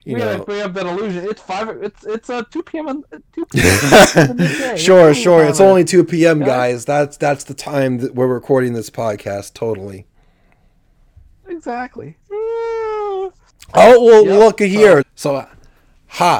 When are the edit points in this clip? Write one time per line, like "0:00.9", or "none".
0:12.2
0:15.0